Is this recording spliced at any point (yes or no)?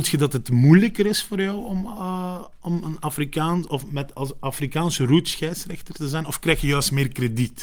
no